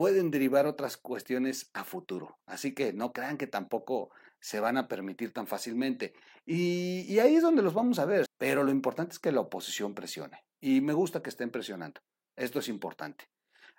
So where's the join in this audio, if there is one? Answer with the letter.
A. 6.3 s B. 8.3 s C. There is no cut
B